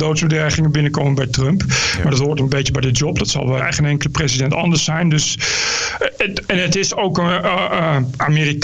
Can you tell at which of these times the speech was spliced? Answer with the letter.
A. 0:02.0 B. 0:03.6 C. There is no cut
B